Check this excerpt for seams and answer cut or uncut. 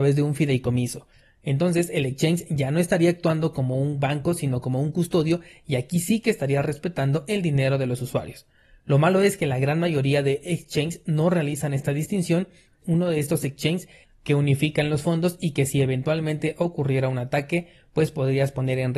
cut